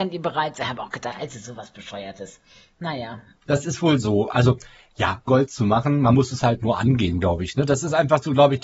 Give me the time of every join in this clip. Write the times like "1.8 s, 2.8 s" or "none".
5.3 s